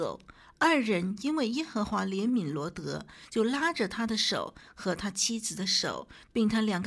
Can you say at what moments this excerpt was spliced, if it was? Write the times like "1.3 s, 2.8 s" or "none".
none